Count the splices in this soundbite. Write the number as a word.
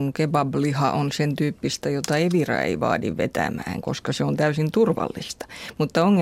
zero